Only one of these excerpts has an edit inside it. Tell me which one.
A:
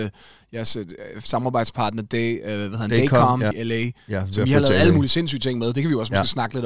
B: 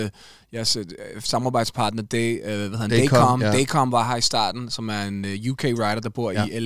A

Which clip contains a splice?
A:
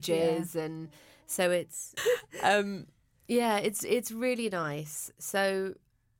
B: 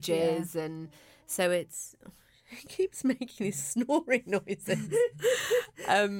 A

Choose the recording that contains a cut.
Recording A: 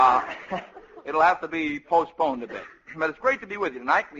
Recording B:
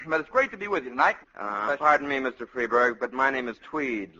B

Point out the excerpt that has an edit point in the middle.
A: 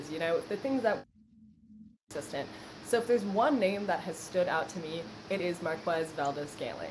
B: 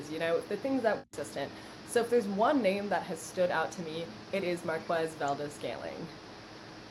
B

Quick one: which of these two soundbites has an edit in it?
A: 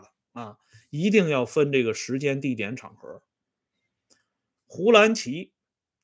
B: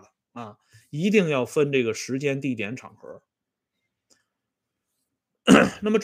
A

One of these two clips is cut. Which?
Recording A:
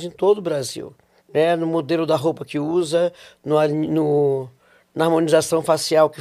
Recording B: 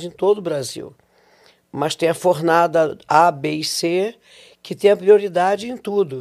A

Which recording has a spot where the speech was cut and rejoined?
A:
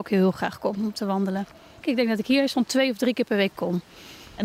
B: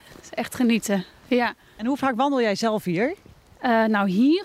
A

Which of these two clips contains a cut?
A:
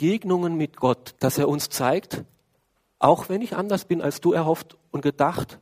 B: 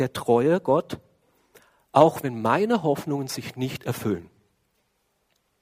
A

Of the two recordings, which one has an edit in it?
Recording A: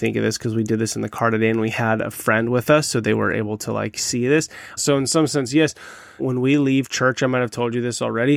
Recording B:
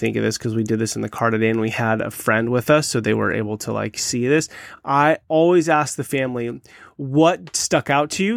A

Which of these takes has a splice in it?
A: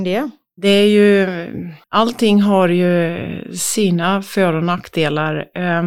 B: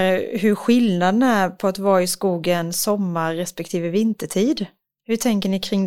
A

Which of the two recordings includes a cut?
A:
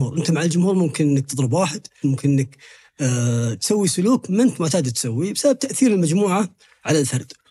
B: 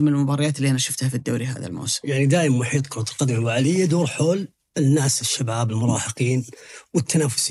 A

